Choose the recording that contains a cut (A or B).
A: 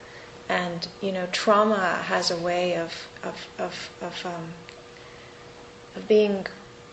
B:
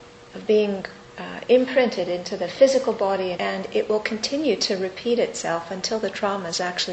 B